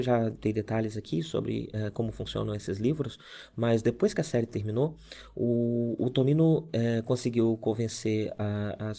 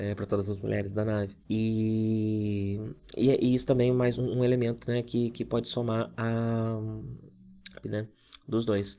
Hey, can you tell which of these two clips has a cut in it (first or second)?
second